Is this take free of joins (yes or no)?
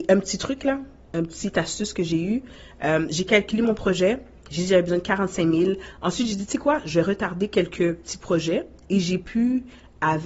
yes